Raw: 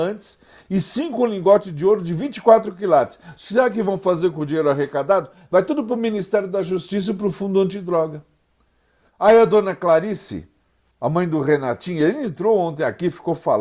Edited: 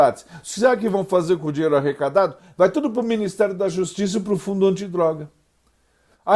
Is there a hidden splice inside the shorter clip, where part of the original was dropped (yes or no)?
no